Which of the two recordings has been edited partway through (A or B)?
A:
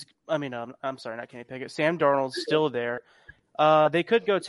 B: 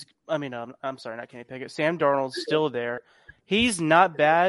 A